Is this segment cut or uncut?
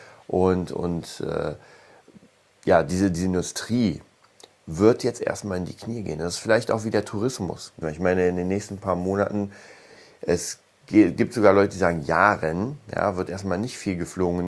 cut